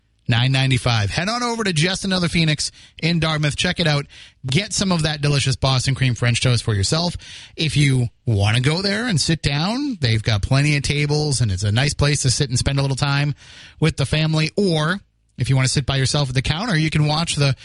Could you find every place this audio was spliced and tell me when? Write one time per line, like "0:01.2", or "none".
none